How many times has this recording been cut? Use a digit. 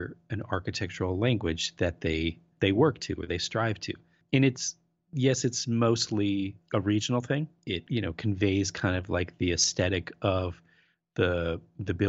0